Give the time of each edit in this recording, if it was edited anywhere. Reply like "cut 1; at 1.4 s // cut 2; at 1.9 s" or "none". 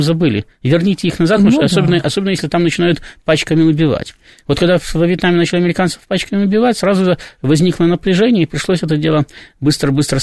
none